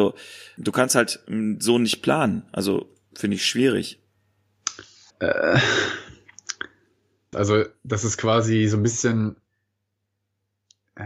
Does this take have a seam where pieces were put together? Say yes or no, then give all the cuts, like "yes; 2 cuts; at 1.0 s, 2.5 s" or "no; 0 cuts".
yes; 2 cuts; at 5.1 s, 7.3 s